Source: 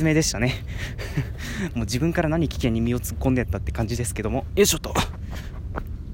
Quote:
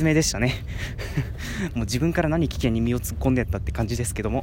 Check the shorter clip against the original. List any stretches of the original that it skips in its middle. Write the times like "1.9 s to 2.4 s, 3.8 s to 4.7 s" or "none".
none